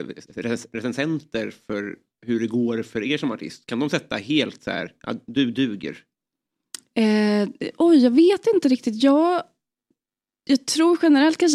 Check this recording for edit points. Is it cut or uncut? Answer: uncut